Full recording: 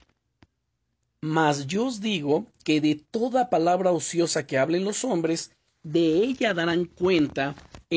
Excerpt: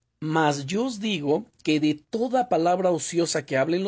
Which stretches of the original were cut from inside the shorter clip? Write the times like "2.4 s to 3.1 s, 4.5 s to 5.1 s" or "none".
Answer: none